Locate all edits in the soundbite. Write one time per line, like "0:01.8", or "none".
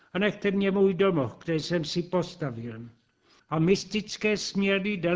0:03.4